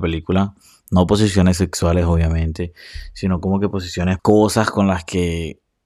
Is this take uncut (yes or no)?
no